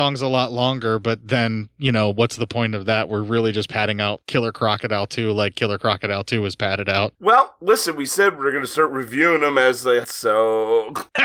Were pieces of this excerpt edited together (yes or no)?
yes